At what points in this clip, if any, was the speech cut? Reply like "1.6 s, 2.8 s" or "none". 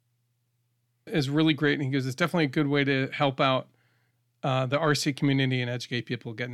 1.1 s